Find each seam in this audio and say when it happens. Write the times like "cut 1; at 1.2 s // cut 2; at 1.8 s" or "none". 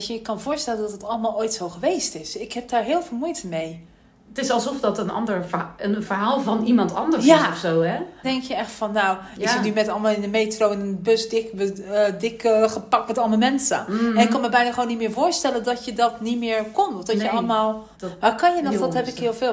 cut 1; at 8.2 s // cut 2; at 17.9 s